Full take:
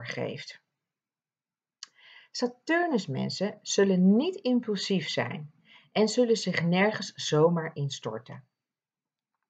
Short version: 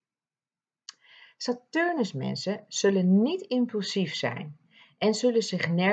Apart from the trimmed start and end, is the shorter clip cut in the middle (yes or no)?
no